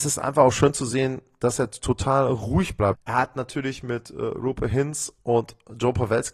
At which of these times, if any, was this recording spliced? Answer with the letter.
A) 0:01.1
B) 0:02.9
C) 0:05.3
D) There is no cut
B